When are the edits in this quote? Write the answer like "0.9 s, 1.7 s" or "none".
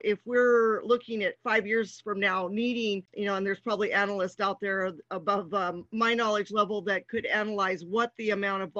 none

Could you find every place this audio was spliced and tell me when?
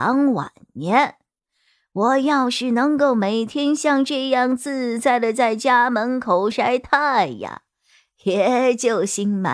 6.5 s

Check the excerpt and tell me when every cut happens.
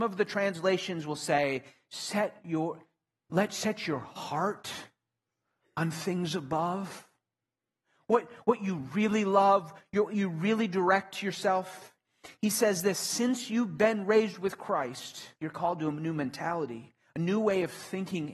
15.4 s

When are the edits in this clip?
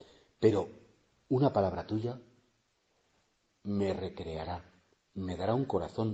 none

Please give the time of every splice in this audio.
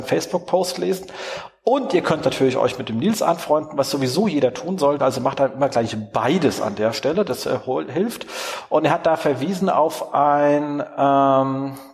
none

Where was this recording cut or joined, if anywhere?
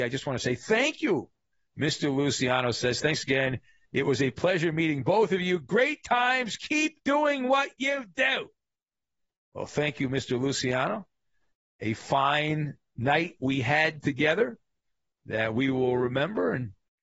none

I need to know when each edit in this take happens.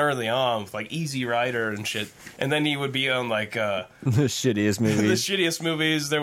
none

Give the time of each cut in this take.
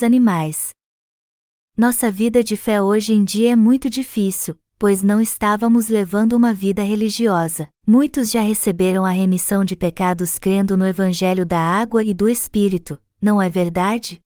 7.7 s

